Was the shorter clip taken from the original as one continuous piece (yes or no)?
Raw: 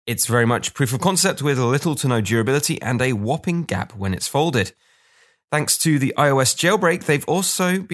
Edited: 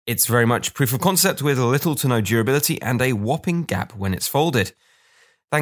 yes